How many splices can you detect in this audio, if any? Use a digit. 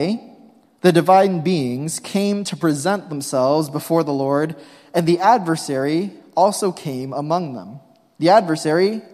1